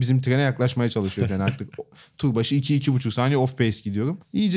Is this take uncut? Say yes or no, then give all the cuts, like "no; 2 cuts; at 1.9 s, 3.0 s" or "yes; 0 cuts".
yes; 0 cuts